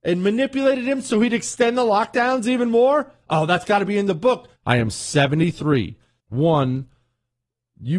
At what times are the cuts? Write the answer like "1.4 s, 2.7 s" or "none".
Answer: 4.6 s, 6.2 s